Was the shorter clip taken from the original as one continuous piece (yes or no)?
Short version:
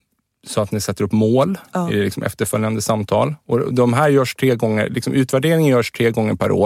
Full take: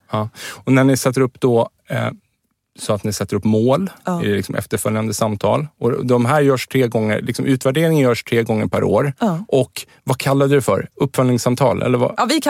yes